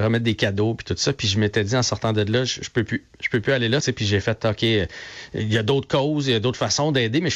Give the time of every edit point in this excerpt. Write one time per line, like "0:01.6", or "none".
0:03.8